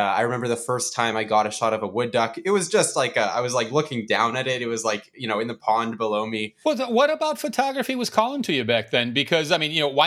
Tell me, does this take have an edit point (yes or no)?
yes